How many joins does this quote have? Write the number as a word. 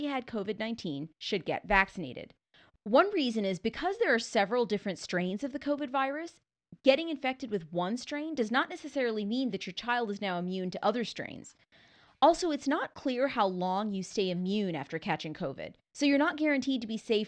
one